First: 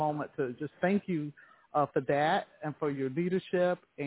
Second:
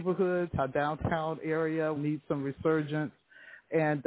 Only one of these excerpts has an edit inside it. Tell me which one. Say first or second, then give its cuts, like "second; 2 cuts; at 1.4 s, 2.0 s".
second; 1 cut; at 2.0 s